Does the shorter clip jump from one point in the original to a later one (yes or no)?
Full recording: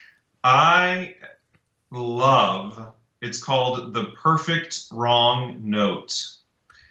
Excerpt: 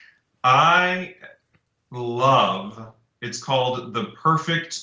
no